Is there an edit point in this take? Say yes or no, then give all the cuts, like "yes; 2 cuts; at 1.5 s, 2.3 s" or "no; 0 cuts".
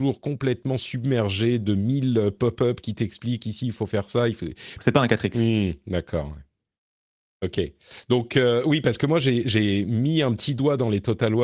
yes; 1 cut; at 4.8 s